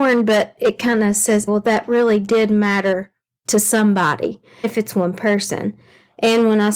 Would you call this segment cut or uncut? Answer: cut